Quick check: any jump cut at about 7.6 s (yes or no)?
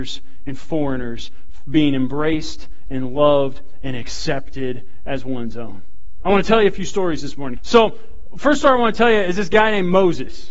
yes